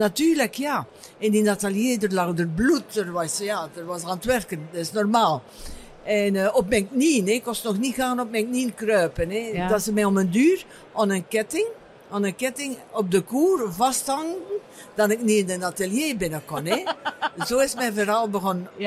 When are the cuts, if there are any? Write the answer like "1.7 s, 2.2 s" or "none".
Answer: none